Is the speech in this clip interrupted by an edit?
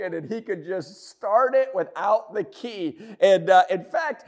no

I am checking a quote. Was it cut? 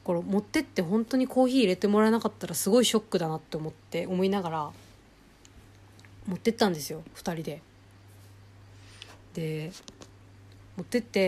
no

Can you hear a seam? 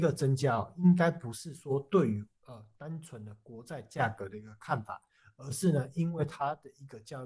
no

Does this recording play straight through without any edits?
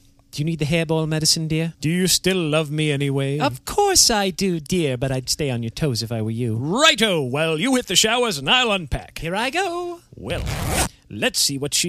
no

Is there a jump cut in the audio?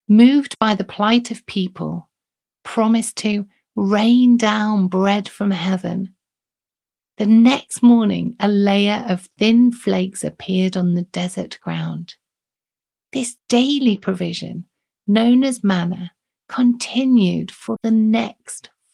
no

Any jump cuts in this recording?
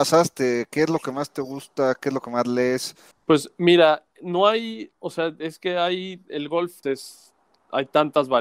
yes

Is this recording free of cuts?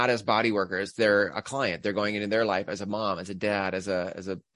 yes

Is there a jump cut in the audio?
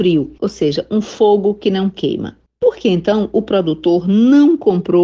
no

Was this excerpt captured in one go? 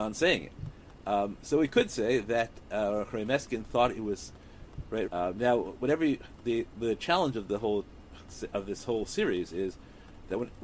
no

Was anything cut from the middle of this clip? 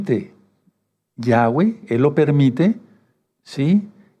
no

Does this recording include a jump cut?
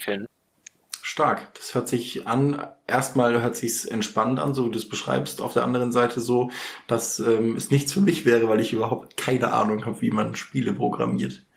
no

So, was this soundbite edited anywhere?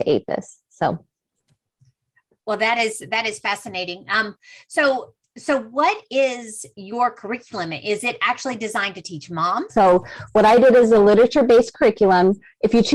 yes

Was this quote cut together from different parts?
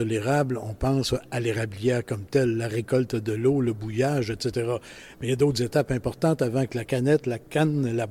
no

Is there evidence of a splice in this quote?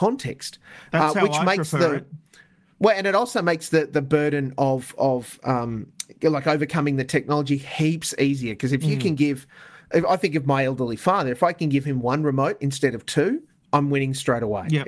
no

